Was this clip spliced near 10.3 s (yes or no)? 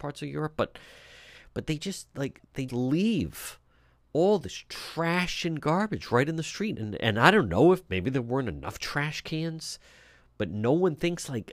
no